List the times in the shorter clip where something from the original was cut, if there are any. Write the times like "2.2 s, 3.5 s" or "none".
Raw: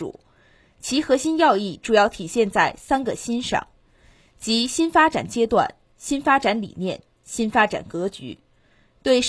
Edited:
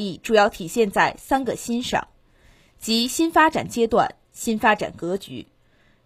4.2 s